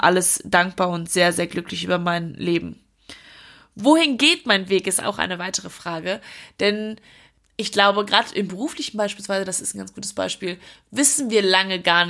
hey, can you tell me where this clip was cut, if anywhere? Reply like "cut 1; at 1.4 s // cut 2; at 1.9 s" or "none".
none